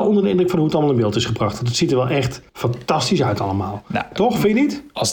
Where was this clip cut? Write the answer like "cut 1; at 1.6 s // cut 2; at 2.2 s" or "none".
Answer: cut 1; at 2.5 s